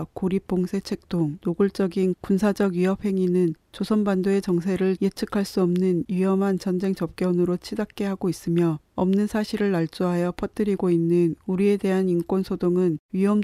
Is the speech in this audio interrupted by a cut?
no; 0 cuts

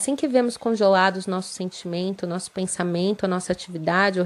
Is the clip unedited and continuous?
yes; 0 cuts

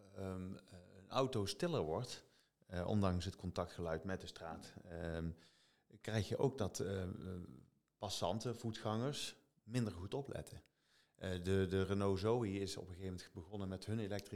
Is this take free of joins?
yes; 0 cuts

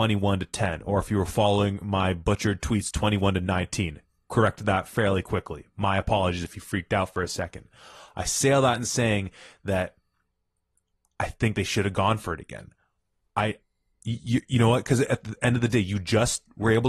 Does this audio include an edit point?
no; 0 cuts

